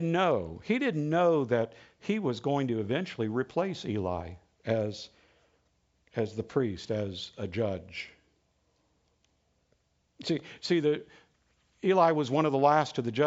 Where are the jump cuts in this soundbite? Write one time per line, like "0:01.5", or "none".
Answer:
none